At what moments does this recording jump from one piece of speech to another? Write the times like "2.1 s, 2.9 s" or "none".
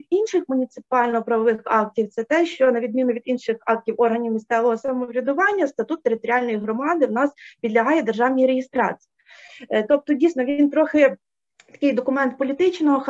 none